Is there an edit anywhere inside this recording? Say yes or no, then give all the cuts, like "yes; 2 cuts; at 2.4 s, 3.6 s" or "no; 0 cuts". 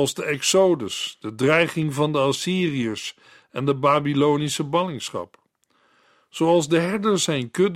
no; 0 cuts